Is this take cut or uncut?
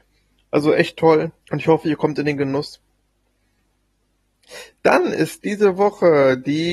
cut